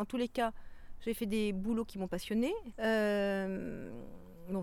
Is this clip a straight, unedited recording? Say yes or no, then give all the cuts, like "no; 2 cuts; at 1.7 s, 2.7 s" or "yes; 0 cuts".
no; 1 cut; at 2.7 s